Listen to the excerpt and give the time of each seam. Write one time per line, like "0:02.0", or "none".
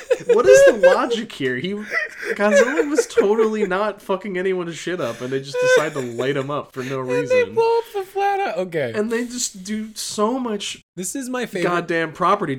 0:10.9